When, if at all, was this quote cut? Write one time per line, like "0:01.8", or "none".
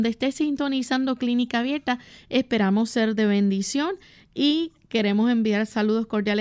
none